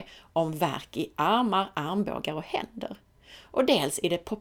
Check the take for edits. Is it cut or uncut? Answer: uncut